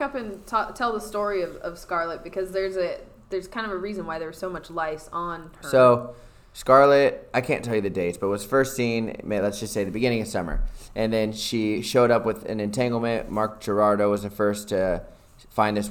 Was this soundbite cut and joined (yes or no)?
no